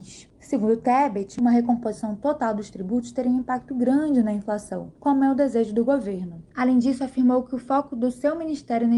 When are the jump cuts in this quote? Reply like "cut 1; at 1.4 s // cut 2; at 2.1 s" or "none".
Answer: cut 1; at 5.0 s // cut 2; at 6.5 s

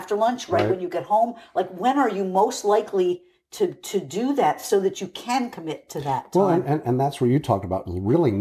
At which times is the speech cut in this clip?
none

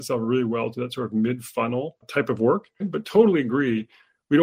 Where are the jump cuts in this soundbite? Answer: cut 1; at 2.8 s

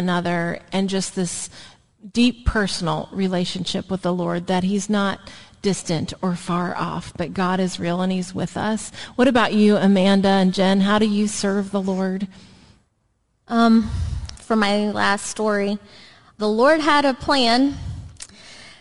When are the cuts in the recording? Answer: cut 1; at 14.3 s // cut 2; at 16.4 s

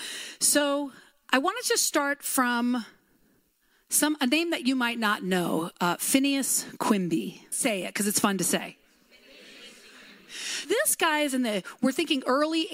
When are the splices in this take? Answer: cut 1; at 7.5 s // cut 2; at 10.6 s

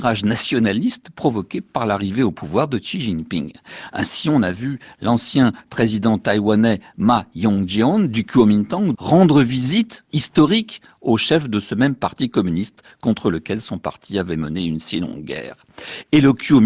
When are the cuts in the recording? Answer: cut 1; at 8.9 s

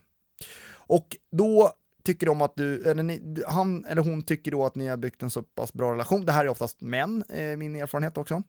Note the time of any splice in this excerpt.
none

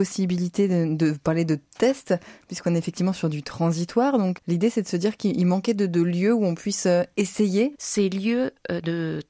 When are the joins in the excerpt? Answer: cut 1; at 4.4 s // cut 2; at 7.7 s

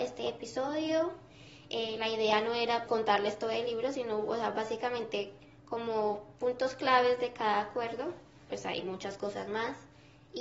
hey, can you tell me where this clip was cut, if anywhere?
cut 1; at 2.9 s // cut 2; at 8.5 s

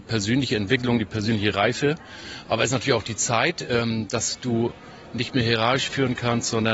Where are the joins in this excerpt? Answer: none

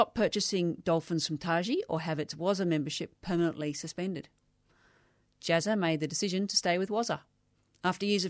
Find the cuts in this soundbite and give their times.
none

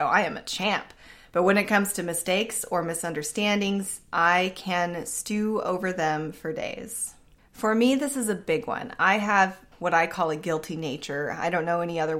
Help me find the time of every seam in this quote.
cut 1; at 7.4 s // cut 2; at 9.7 s

